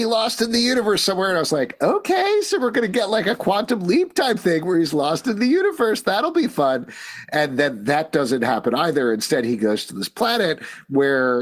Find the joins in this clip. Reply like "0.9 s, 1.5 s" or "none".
none